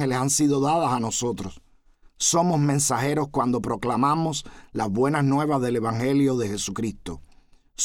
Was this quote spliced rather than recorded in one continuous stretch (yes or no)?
no